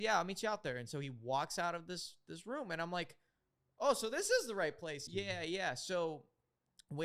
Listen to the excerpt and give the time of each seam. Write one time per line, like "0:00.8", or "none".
0:05.1